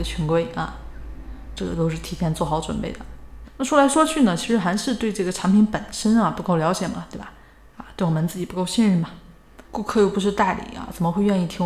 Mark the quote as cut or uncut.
cut